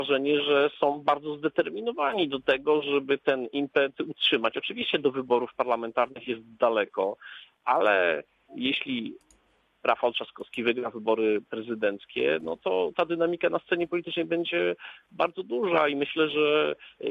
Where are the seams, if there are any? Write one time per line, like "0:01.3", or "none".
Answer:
none